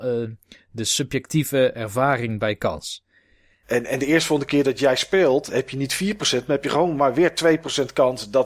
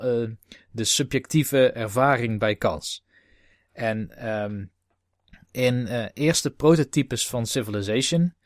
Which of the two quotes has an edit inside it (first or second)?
first